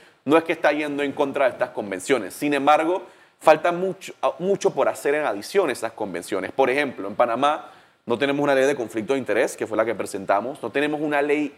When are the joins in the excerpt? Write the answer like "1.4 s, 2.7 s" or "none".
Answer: none